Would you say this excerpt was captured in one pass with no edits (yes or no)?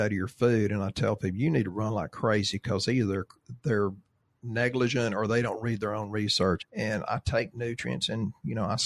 no